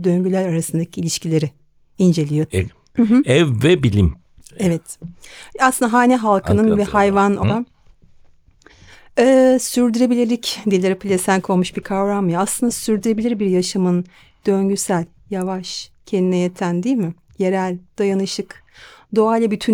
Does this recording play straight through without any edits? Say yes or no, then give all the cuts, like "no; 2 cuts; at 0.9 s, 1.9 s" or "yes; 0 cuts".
no; 2 cuts; at 2.5 s, 7.4 s